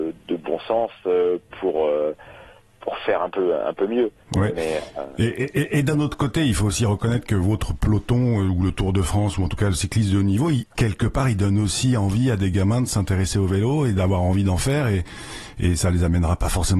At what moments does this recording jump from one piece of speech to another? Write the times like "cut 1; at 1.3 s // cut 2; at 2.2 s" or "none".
none